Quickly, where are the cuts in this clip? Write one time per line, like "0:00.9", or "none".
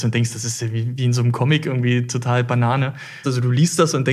0:03.2